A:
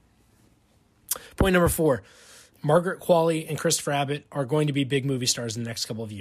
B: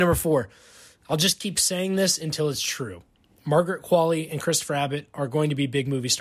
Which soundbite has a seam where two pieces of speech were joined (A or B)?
A